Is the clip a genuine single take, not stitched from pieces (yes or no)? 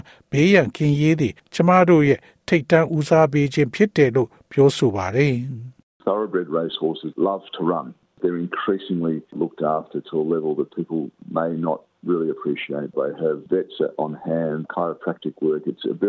no